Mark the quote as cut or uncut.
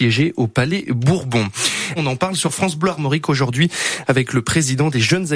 cut